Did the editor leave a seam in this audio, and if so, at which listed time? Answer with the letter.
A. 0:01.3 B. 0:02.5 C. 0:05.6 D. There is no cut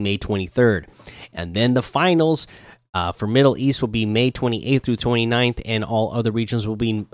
D